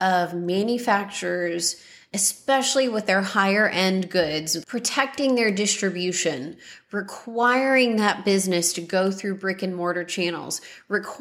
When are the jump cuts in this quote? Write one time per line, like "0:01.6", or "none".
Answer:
0:04.6